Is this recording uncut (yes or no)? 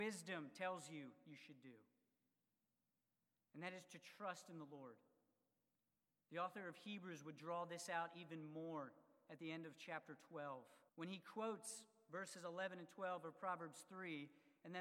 no